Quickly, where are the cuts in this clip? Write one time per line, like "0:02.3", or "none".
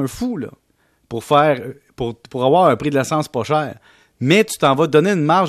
none